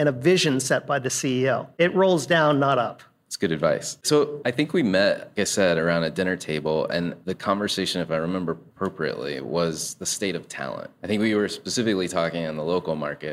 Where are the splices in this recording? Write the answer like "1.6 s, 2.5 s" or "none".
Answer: 5.4 s